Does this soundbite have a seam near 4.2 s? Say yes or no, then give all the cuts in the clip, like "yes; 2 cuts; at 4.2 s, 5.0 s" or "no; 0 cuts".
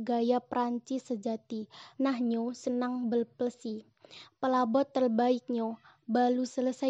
yes; 2 cuts; at 2.0 s, 4.2 s